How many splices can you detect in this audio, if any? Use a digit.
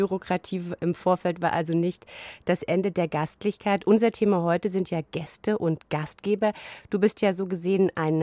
0